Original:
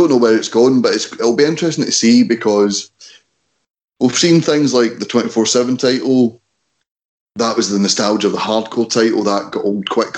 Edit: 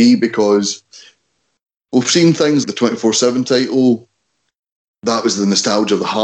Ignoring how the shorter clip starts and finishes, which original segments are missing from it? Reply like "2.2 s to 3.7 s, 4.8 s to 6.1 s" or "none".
4.7 s to 5.0 s